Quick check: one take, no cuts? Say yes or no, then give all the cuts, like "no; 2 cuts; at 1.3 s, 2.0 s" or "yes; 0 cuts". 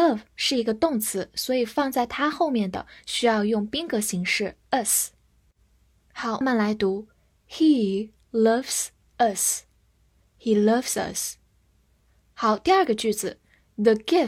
no; 1 cut; at 6.4 s